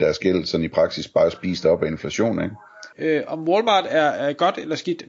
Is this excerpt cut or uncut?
cut